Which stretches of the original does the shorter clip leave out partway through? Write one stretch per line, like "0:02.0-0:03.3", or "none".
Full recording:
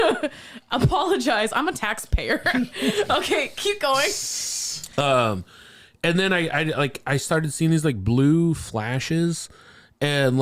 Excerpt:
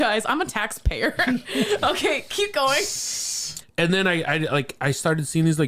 0:04.9-0:05.9